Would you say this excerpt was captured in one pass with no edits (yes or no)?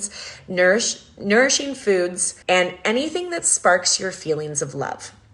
no